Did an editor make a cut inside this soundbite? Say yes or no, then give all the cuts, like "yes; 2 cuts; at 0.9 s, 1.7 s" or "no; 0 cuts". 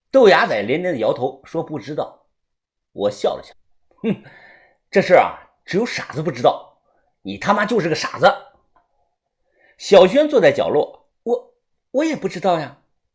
yes; 2 cuts; at 8.8 s, 11.1 s